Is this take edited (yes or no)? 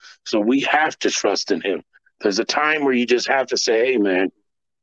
no